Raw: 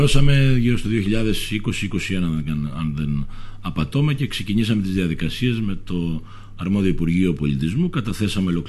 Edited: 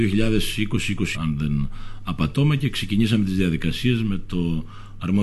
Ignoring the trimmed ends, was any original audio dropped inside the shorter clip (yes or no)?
yes